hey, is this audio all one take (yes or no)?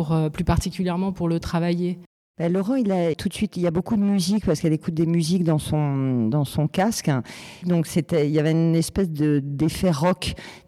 no